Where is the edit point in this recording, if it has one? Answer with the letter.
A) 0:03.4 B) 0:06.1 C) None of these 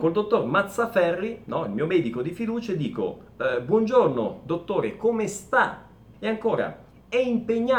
B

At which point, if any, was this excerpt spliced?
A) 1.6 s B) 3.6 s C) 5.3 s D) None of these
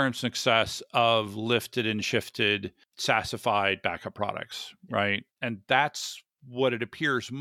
C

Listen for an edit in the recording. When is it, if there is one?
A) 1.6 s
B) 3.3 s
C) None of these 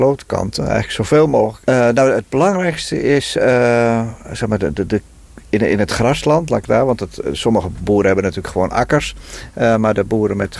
A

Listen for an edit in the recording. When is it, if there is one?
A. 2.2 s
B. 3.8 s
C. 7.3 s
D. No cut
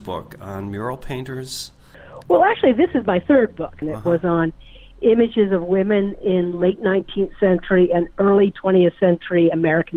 B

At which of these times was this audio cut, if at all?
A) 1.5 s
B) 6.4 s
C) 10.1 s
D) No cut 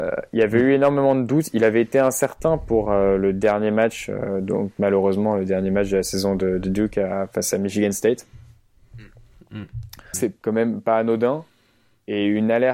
C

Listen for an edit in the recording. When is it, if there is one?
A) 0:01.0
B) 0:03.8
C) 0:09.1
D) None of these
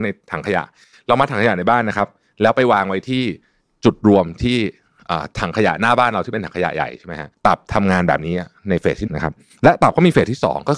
C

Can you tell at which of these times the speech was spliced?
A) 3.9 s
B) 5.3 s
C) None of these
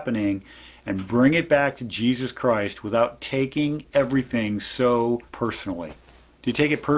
B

